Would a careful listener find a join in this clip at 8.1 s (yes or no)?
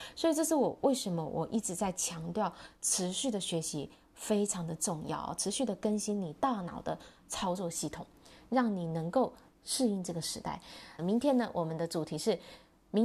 no